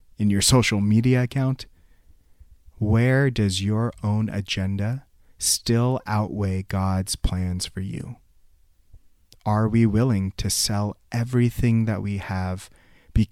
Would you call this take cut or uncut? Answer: uncut